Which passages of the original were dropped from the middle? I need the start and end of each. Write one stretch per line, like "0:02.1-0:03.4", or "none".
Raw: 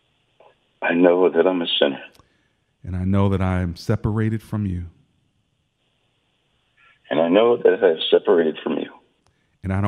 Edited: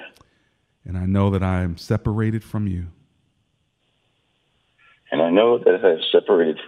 none